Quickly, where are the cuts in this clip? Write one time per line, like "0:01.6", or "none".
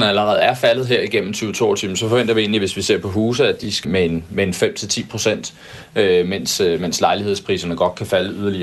0:03.8

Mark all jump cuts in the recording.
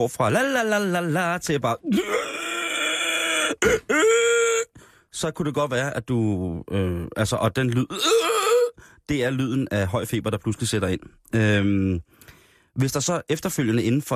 none

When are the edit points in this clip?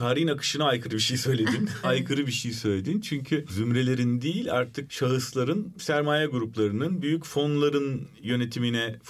0:01.8

